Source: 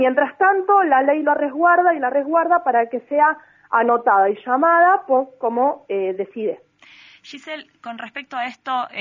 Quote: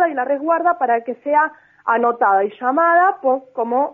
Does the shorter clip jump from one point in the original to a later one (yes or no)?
no